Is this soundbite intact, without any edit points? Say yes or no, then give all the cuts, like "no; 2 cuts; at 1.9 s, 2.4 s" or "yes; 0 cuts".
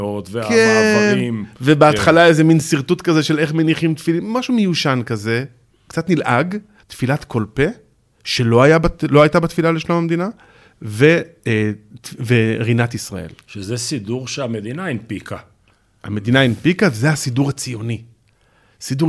no; 1 cut; at 6.8 s